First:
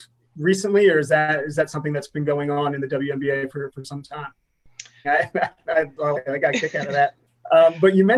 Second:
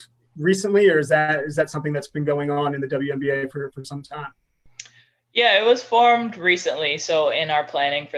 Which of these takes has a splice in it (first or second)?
first